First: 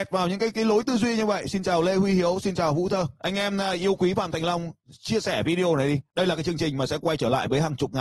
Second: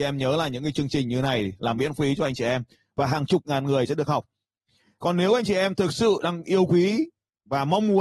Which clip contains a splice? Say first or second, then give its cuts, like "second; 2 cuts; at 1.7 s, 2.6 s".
first; 1 cut; at 4.8 s